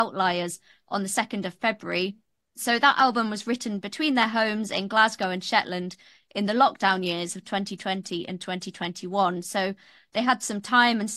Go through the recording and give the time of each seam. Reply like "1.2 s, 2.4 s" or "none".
none